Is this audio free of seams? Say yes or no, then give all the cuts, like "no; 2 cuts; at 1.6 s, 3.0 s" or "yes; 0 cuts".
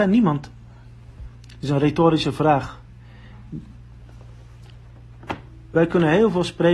yes; 0 cuts